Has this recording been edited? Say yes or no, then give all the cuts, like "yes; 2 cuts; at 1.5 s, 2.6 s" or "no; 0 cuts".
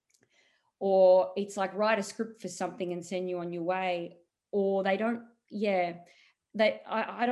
no; 0 cuts